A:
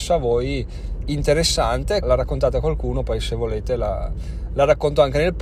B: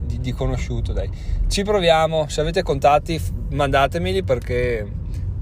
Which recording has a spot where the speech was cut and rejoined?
A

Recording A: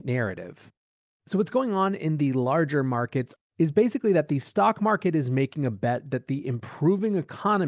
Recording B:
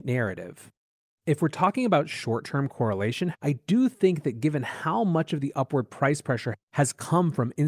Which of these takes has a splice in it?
B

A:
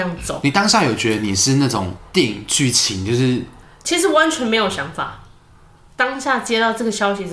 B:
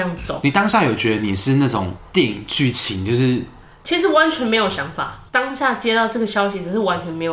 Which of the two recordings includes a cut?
B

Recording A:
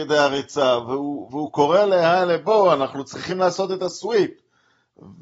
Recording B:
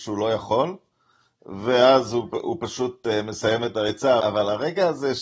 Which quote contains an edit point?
B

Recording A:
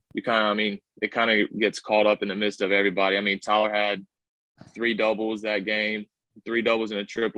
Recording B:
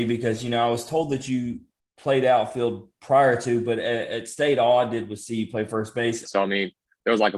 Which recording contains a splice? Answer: B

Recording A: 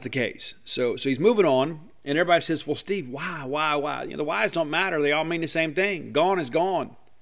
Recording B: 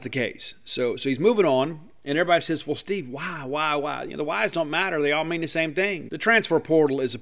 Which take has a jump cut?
B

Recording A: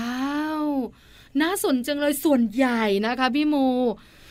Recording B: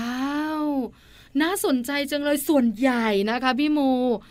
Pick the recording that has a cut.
A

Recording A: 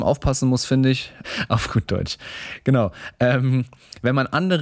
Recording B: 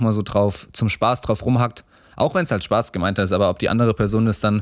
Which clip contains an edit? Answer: A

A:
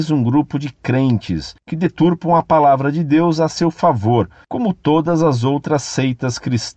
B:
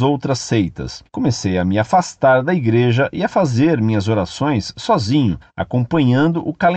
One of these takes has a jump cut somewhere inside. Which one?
B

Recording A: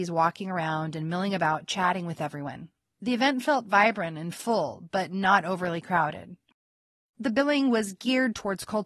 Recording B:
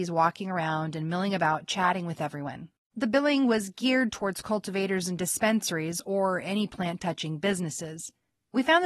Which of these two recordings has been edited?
B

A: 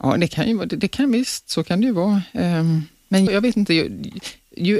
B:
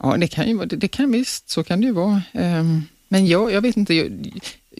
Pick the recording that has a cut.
A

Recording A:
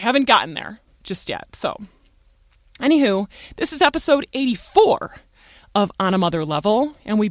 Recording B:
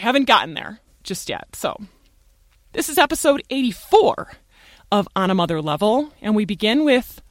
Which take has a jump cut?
B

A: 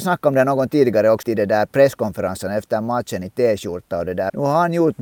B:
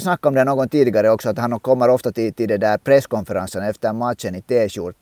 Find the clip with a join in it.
A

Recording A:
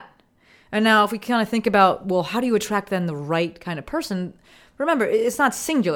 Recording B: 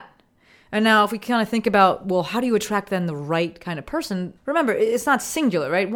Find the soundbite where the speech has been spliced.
B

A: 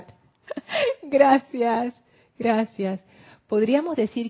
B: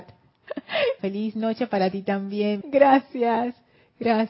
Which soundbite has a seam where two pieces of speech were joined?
B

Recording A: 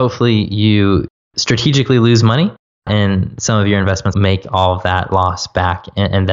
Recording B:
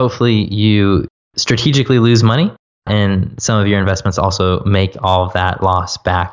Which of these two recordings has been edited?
A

